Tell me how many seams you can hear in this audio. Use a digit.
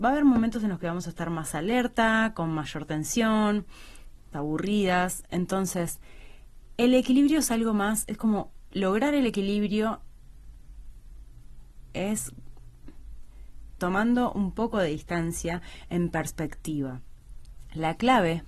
2